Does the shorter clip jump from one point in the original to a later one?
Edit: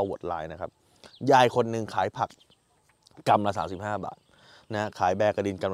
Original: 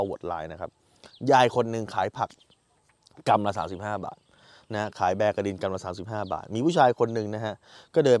no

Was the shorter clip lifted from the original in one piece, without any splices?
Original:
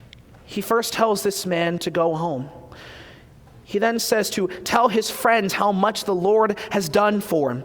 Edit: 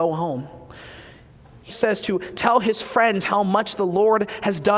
no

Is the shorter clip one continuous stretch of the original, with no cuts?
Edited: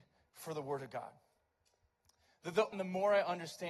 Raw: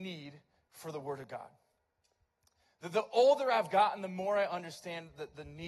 no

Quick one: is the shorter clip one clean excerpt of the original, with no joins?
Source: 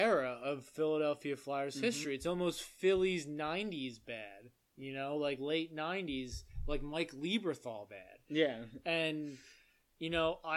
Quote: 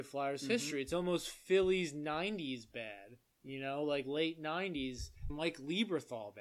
no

